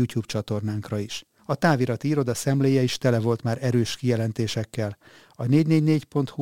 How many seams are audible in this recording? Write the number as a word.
one